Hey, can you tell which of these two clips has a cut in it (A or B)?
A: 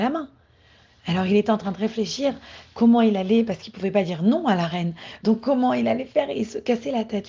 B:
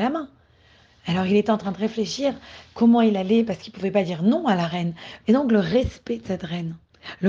B